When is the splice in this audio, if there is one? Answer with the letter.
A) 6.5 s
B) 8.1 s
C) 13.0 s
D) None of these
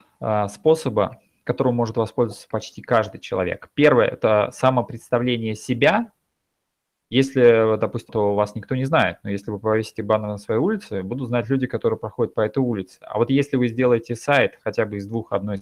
B